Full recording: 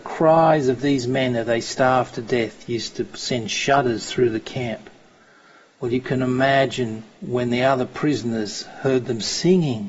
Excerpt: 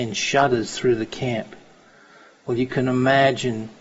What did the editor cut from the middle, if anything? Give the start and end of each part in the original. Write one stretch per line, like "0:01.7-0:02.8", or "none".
none